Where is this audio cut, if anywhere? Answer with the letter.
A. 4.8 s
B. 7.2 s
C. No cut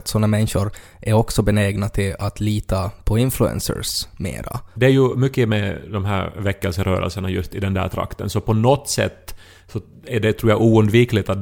A